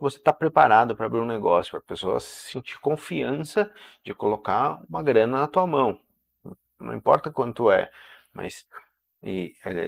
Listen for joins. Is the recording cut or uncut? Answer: uncut